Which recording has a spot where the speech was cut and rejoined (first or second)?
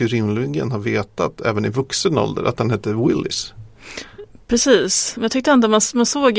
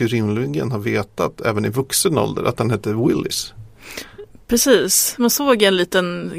second